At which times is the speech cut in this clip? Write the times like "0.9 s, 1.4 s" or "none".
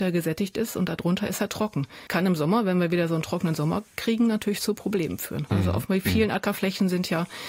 2.1 s, 5.5 s